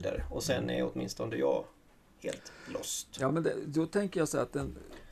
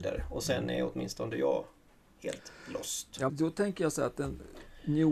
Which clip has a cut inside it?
second; 1 cut; at 3.3 s

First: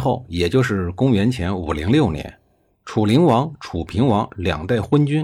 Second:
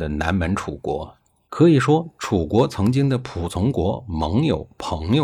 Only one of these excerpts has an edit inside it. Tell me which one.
second; 1 cut; at 1.5 s

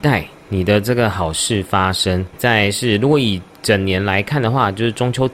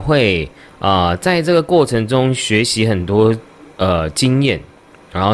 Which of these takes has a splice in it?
first; 1 cut; at 2.3 s

